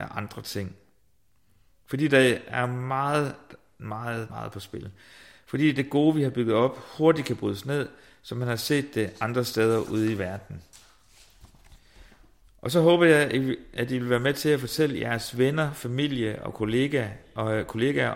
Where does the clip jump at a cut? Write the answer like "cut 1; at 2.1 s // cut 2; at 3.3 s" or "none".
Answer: cut 1; at 4.3 s